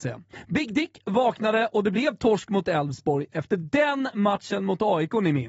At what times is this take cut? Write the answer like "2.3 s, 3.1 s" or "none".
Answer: none